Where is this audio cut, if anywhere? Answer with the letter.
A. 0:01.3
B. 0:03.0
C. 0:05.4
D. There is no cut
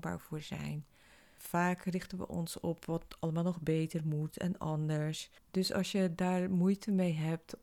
C